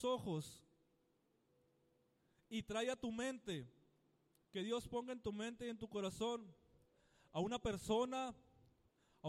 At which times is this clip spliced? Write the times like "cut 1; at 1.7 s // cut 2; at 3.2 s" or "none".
cut 1; at 4.4 s